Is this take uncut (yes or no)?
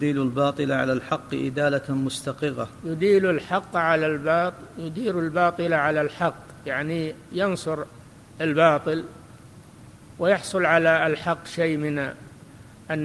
yes